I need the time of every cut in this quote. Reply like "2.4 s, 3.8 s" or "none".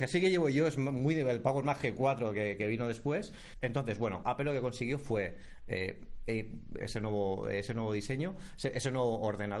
4.2 s, 6.8 s